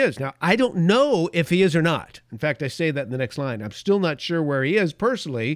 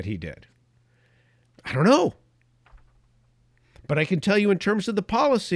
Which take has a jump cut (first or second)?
second